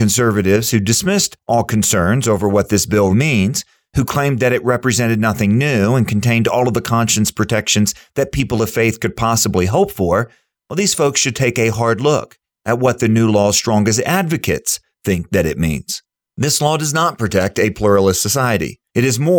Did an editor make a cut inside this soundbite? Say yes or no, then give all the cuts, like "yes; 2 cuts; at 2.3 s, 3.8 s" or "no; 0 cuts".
yes; 1 cut; at 3.1 s